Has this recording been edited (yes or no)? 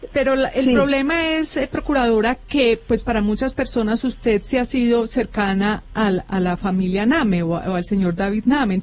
no